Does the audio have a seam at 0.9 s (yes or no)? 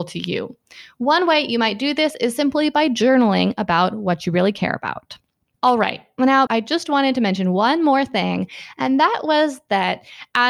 no